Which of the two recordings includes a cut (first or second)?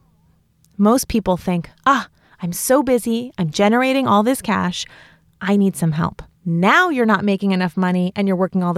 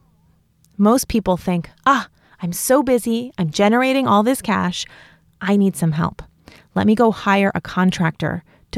first